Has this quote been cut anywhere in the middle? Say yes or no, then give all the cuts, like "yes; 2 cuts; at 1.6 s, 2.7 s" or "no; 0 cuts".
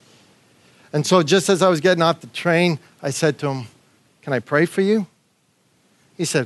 no; 0 cuts